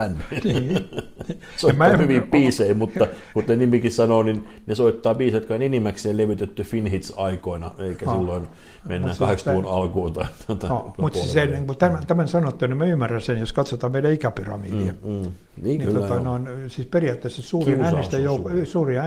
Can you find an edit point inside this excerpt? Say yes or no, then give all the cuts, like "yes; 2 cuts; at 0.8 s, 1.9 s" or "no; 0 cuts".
no; 0 cuts